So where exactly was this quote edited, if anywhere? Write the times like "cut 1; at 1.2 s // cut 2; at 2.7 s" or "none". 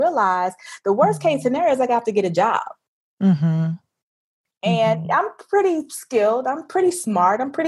none